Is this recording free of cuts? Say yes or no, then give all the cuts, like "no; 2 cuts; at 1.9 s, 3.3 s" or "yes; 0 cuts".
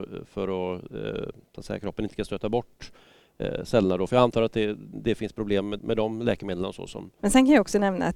no; 2 cuts; at 5.8 s, 7.2 s